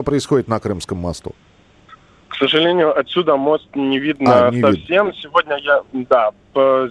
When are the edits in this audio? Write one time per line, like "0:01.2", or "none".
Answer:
none